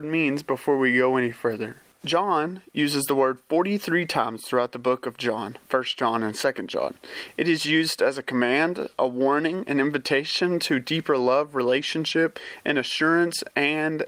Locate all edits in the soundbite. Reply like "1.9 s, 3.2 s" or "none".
none